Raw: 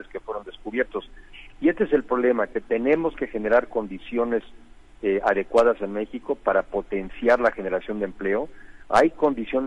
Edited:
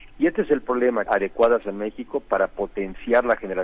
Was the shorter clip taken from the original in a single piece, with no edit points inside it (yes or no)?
no